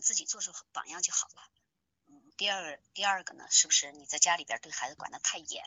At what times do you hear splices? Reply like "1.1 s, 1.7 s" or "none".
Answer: 2.3 s